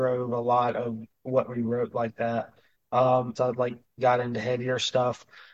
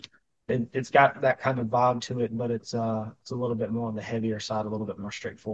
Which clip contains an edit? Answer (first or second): first